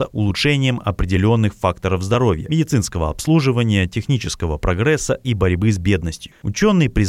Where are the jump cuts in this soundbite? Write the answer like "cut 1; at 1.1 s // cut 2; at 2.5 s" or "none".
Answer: none